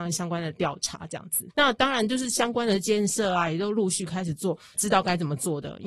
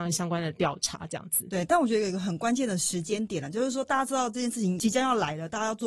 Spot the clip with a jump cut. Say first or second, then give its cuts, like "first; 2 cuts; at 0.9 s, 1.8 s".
first; 2 cuts; at 1.5 s, 4.7 s